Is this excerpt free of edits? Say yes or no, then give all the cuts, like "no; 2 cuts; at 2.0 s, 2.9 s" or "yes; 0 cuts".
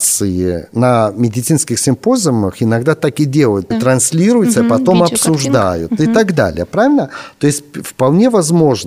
no; 1 cut; at 3.7 s